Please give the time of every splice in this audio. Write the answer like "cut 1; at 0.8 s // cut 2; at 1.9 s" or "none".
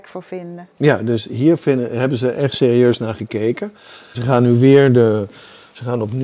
cut 1; at 4.1 s